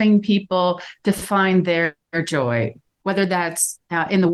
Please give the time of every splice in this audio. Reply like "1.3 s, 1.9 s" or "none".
3.0 s